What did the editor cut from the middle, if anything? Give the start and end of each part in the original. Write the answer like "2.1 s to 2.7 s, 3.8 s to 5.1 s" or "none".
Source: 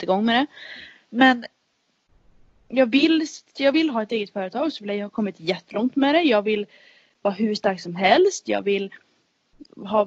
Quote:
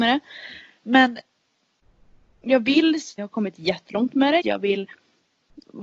3.4 s to 5.0 s, 6.2 s to 8.4 s